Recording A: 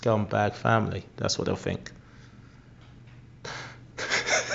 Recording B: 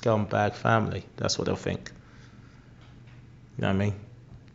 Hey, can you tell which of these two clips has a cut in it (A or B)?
A